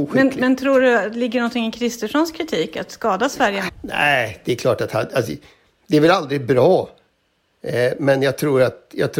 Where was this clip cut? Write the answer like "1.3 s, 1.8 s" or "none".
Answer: 3.7 s